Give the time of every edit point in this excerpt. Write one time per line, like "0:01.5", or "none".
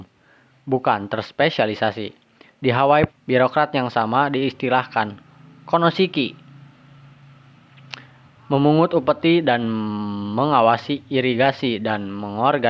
0:03.1